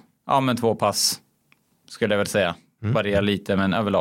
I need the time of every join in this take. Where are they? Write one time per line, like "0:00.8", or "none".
none